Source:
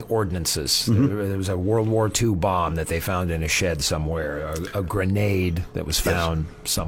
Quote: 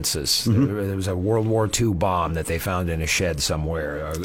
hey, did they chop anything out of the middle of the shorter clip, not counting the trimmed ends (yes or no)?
no